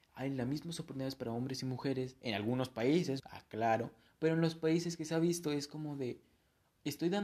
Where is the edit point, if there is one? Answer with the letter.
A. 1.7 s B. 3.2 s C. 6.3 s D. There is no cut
B